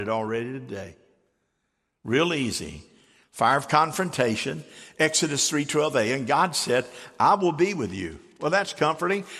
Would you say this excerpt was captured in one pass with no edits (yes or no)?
yes